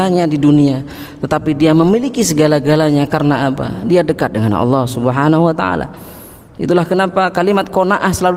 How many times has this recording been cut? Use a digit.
0